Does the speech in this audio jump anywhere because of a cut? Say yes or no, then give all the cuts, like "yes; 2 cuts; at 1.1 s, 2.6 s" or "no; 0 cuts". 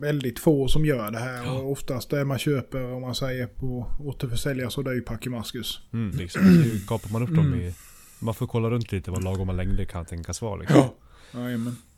yes; 1 cut; at 6.1 s